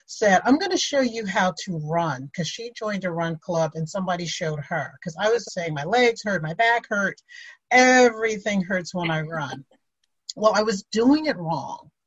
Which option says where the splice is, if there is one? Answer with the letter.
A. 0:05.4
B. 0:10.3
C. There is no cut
A